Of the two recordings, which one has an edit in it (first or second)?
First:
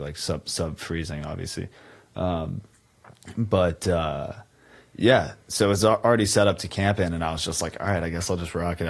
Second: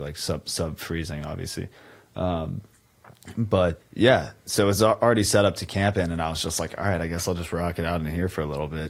second